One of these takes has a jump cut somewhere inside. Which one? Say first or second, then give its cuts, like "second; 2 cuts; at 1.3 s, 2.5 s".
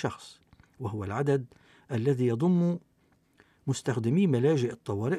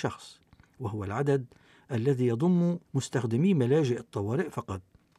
second; 1 cut; at 2.8 s